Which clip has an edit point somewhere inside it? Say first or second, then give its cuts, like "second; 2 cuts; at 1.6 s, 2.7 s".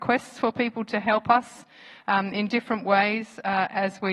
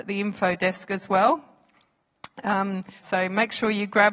second; 1 cut; at 3.0 s